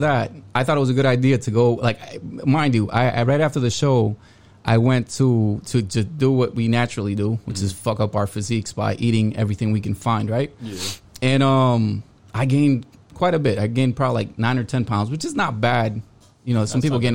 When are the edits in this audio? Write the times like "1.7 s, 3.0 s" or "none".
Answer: none